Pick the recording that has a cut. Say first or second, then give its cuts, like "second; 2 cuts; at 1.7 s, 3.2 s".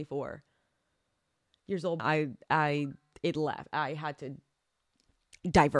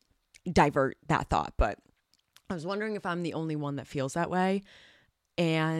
first; 1 cut; at 2.0 s